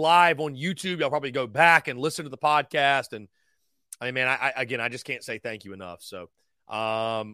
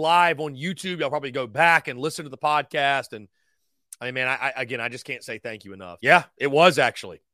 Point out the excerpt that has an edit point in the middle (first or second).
second